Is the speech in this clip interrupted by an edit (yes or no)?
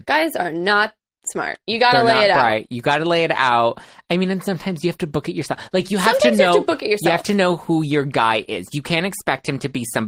no